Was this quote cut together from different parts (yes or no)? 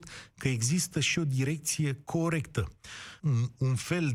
yes